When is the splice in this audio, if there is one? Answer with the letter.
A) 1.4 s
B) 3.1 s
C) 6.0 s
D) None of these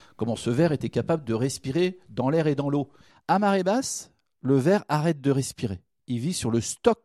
B